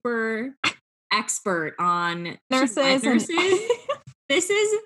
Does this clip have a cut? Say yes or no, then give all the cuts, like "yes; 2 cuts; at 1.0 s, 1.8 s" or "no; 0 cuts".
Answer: yes; 1 cut; at 2.5 s